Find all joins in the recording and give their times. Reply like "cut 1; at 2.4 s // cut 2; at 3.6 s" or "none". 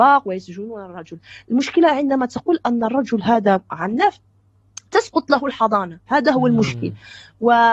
cut 1; at 6.1 s

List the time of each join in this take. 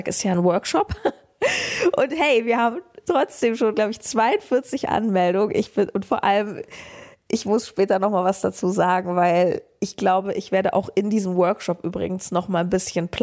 none

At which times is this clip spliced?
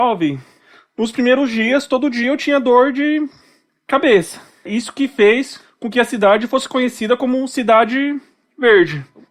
cut 1; at 4.7 s

